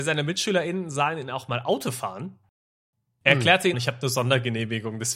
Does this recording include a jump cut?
yes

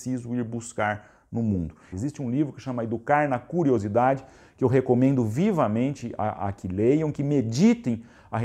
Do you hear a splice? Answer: yes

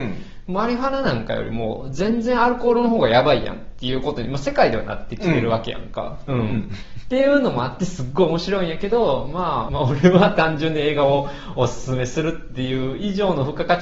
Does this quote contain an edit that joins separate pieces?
yes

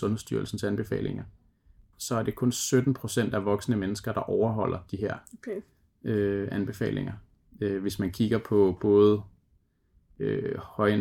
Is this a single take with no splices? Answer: no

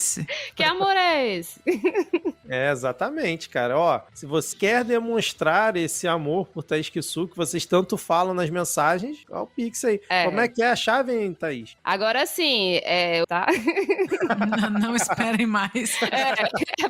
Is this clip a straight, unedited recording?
no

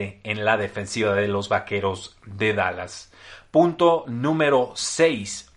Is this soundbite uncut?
yes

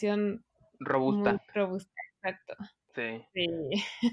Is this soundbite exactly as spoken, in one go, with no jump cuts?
no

